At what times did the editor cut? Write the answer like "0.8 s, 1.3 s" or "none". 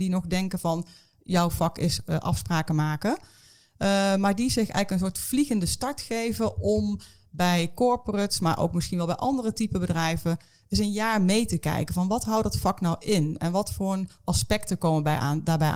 none